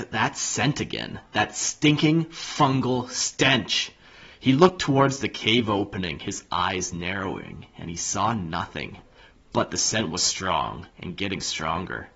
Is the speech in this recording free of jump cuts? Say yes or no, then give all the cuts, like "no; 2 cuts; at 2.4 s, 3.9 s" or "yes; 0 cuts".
yes; 0 cuts